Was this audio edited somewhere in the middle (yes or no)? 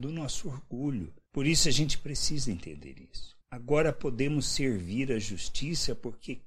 yes